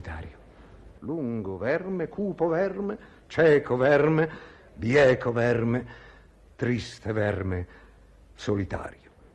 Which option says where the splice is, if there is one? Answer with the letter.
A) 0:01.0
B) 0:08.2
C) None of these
A